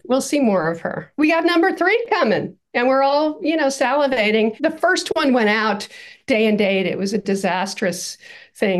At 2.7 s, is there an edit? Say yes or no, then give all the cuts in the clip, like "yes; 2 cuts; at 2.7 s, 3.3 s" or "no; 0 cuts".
no; 0 cuts